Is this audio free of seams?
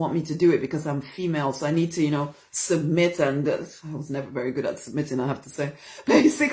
yes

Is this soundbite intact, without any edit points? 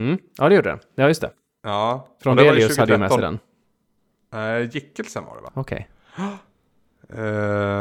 no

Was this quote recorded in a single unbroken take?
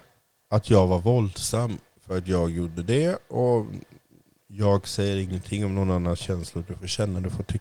yes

